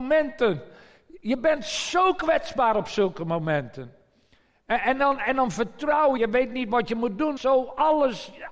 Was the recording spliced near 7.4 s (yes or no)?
yes